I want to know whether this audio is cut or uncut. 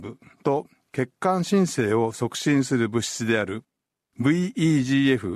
uncut